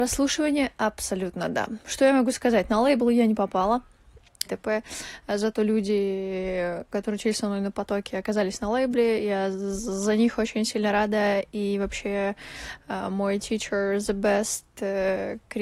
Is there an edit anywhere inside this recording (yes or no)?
yes